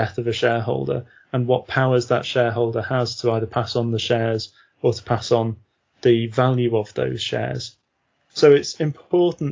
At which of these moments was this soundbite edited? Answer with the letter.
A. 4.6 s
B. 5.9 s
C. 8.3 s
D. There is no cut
C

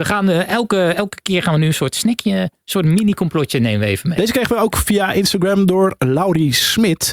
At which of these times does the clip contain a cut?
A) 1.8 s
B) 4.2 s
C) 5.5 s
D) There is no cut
B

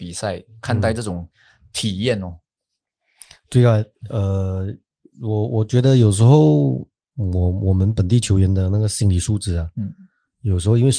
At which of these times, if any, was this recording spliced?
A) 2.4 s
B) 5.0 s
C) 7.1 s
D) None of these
D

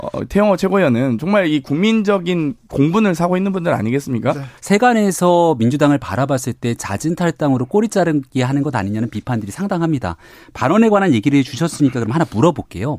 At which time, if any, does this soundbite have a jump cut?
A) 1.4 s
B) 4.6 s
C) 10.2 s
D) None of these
B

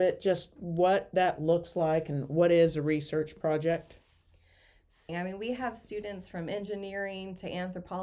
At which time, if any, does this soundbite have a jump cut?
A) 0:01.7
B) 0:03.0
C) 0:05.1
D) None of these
C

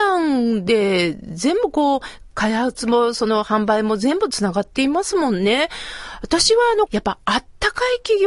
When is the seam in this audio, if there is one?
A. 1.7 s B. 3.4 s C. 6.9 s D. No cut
C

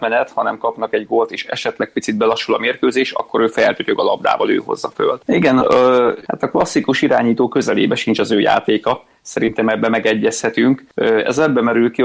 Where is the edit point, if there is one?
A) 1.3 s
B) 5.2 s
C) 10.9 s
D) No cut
B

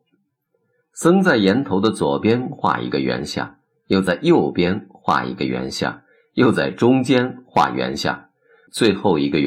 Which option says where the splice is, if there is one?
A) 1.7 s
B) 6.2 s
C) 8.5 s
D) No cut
D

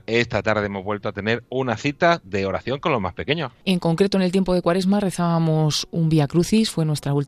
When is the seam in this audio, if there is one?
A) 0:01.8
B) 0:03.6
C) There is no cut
B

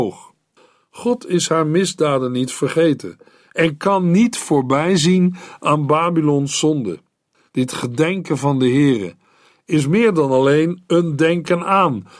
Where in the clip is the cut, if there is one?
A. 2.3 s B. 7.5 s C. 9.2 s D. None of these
B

